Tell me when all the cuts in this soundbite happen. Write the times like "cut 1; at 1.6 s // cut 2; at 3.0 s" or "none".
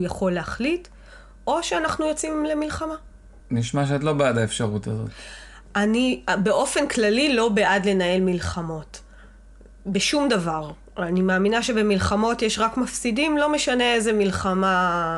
cut 1; at 3.4 s